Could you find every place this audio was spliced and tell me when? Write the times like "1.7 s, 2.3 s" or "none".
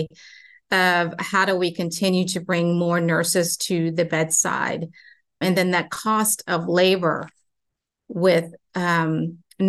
5.4 s